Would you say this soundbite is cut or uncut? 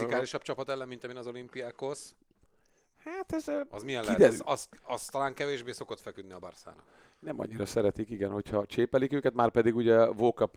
uncut